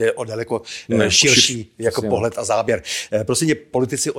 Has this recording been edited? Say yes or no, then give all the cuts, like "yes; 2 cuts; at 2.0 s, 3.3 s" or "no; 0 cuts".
no; 0 cuts